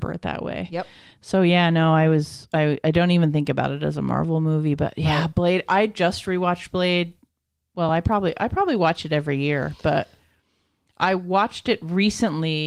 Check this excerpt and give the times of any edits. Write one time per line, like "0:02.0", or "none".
none